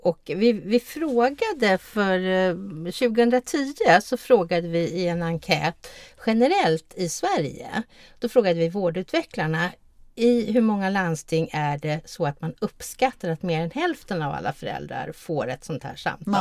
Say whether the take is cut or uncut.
uncut